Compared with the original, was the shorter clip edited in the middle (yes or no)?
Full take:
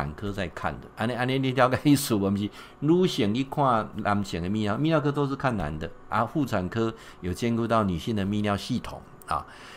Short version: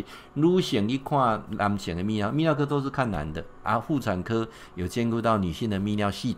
no